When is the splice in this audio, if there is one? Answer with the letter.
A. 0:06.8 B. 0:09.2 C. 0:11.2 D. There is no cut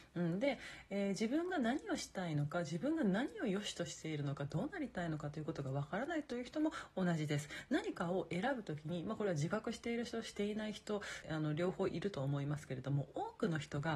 C